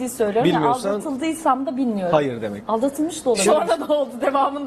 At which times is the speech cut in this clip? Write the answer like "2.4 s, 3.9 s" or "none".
3.5 s